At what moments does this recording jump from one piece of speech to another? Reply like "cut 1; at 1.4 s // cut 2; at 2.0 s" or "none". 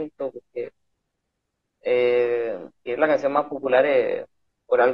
none